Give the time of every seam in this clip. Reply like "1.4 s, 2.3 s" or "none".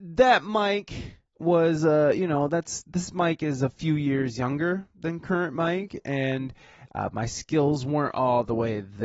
none